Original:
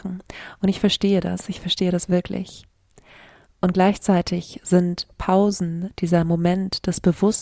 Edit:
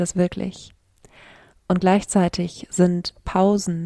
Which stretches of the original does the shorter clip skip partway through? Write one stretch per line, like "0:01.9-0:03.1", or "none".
none